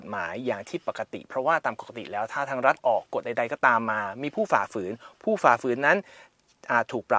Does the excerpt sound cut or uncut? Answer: uncut